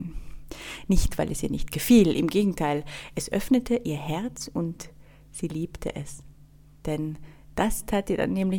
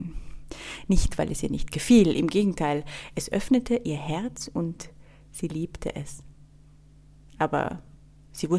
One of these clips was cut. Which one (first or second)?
first